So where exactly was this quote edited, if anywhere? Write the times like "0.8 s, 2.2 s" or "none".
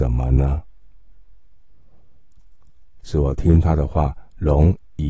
3.0 s